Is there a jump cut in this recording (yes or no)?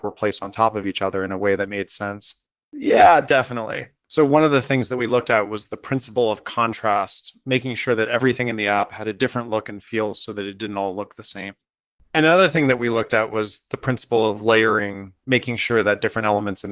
yes